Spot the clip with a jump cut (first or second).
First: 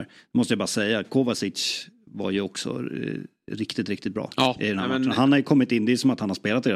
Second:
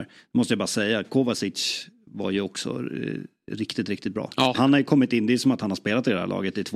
second